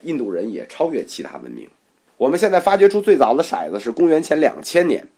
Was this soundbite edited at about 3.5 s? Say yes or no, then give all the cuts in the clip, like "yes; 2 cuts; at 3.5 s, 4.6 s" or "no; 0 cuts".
no; 1 cut; at 2.1 s